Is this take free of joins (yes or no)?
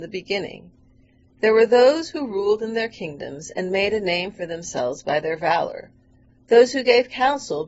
yes